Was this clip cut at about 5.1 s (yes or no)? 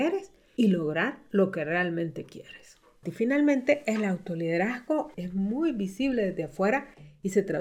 yes